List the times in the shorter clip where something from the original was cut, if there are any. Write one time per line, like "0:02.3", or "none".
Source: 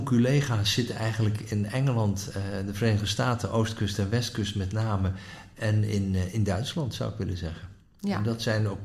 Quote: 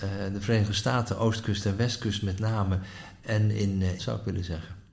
0:04.0